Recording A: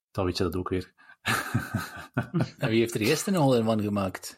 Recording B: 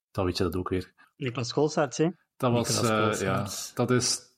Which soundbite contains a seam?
B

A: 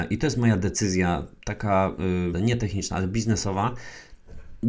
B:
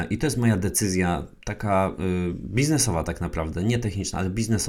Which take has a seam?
A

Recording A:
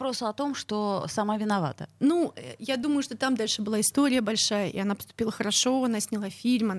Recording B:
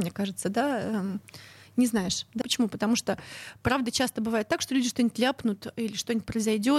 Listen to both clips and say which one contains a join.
B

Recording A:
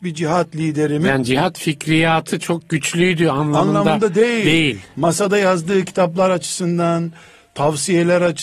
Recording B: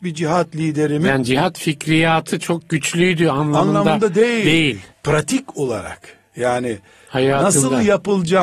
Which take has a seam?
B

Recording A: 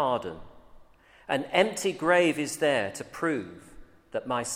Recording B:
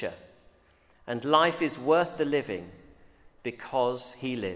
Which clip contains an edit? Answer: B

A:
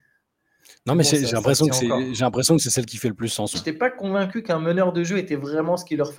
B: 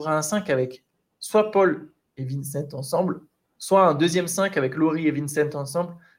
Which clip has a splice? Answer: A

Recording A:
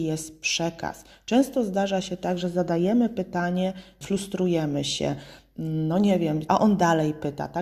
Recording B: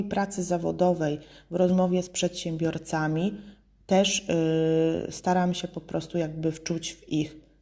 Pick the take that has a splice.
A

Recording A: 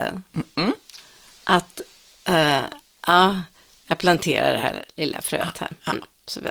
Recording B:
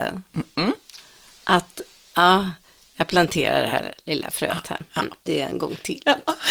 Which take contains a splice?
B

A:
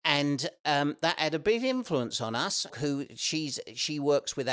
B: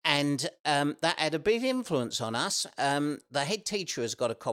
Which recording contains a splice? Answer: A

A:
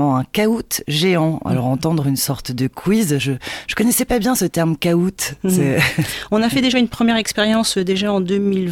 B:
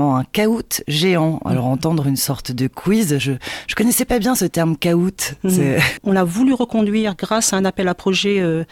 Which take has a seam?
B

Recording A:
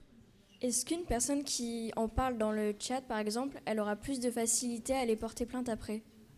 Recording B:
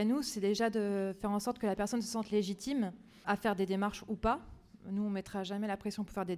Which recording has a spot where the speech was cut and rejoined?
B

